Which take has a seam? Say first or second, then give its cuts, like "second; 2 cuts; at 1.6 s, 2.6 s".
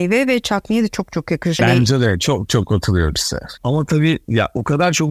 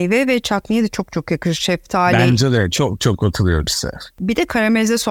first; 2 cuts; at 1.6 s, 3.6 s